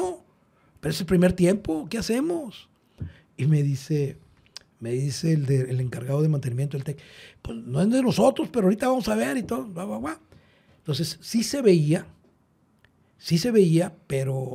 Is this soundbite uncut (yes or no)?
yes